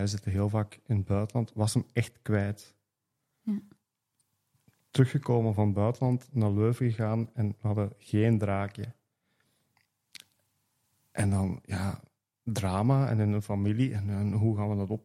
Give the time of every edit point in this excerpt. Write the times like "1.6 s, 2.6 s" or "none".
none